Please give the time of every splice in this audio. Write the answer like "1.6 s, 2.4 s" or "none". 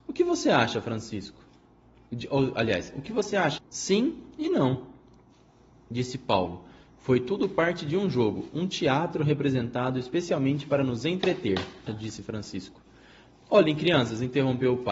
3.6 s, 11.9 s